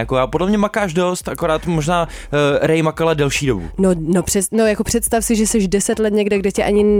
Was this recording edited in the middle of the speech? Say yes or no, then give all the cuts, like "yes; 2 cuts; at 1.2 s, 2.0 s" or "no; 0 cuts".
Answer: no; 0 cuts